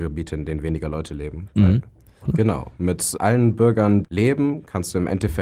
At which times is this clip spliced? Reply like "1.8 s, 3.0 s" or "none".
2.2 s, 4.0 s